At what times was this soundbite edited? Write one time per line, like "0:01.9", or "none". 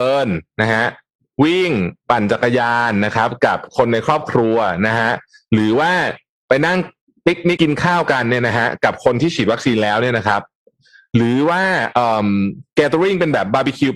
0:07.6

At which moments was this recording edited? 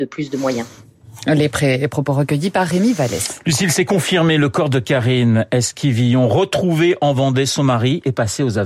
none

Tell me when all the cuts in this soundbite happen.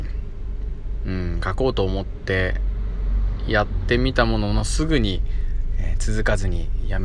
none

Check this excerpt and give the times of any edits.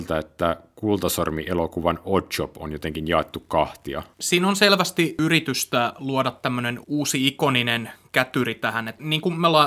0:04.1
0:06.8

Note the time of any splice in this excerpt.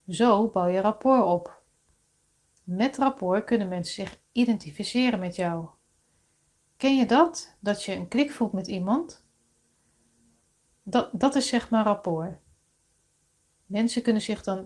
none

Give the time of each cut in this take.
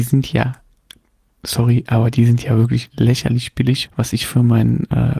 0:03.9

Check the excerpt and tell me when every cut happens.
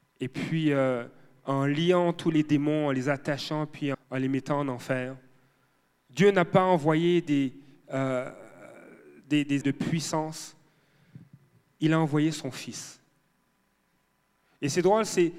0:03.9
0:09.6

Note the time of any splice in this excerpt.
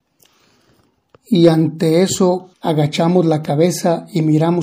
0:02.5

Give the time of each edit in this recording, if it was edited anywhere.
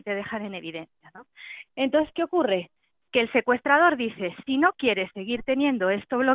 none

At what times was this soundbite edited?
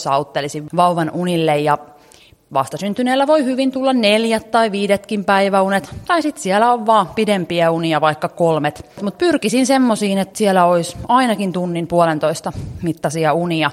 none

